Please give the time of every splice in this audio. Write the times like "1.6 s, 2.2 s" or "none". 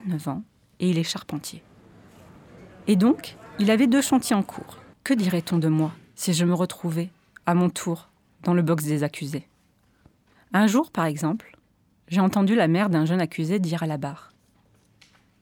4.9 s

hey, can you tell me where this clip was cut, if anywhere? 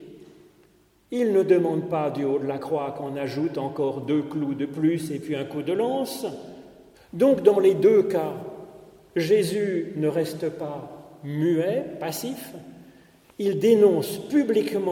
6.9 s

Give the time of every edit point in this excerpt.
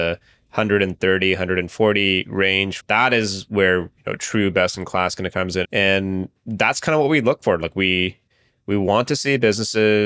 2.8 s, 5.6 s

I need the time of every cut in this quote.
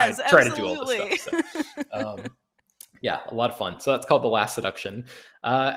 none

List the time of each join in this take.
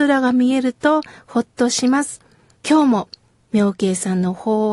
2.6 s

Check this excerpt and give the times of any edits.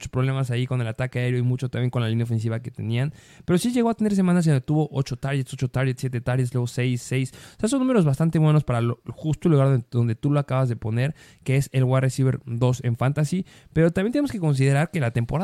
none

